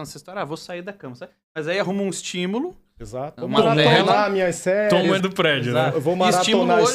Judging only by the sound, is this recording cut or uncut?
cut